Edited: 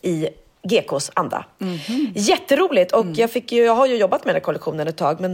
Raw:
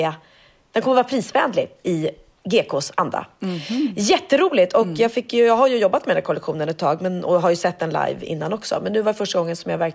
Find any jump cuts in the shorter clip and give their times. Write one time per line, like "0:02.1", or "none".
none